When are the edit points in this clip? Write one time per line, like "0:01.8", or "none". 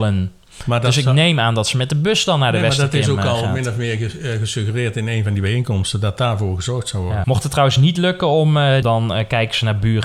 0:07.2
0:08.8